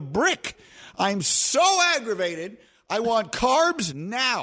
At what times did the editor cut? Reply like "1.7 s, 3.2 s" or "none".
none